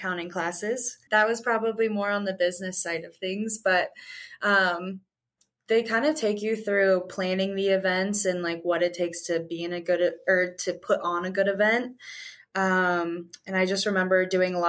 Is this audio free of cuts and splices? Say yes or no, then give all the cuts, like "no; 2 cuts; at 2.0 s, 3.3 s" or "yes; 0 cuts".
no; 1 cut; at 1.1 s